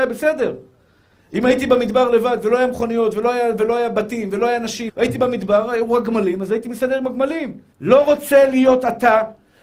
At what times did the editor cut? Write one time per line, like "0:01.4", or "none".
0:04.9
0:07.7